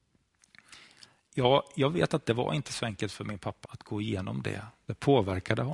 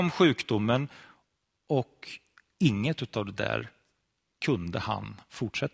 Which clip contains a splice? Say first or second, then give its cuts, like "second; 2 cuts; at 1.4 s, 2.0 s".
first; 1 cut; at 3.6 s